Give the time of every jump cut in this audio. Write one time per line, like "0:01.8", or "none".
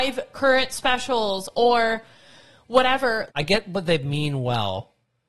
0:03.3

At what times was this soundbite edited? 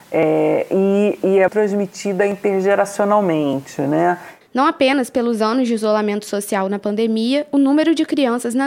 0:01.5
0:04.4

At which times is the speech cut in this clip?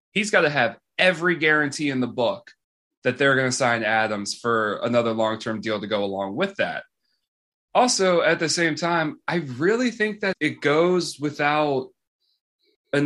0:10.3

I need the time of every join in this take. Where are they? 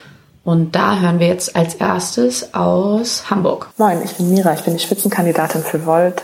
0:03.7

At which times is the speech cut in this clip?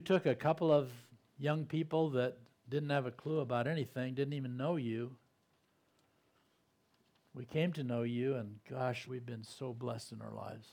0:09.1

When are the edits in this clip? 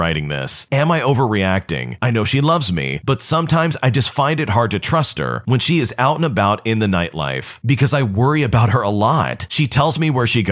0:02.0

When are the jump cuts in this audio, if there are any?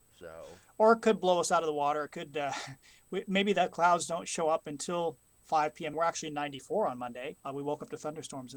0:05.9
0:07.4

